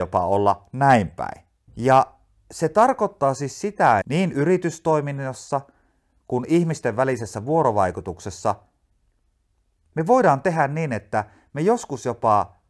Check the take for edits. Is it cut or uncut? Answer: cut